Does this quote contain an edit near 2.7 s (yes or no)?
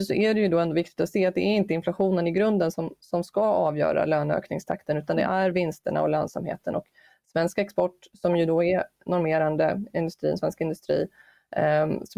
no